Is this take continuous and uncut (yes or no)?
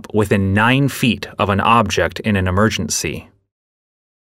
yes